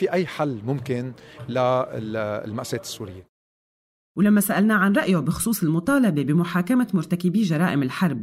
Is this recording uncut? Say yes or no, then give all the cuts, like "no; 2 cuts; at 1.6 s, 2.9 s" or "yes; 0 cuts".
yes; 0 cuts